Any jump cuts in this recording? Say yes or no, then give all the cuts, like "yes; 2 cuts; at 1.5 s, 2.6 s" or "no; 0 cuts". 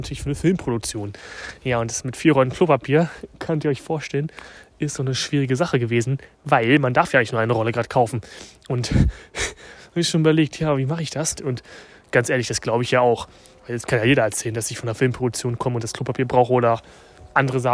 yes; 1 cut; at 11.4 s